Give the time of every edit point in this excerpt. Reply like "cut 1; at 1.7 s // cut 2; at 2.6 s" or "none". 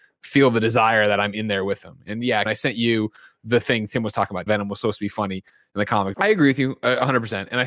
cut 1; at 2.5 s // cut 2; at 4.5 s // cut 3; at 6.1 s